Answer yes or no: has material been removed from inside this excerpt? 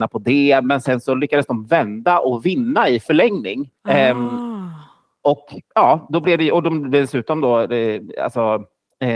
yes